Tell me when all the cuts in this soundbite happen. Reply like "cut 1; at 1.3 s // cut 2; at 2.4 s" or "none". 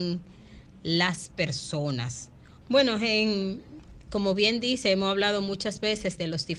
cut 1; at 2.6 s